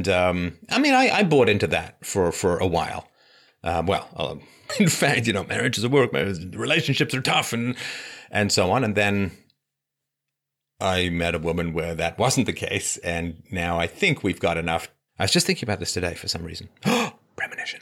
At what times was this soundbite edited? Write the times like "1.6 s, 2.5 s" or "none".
4.7 s, 15.1 s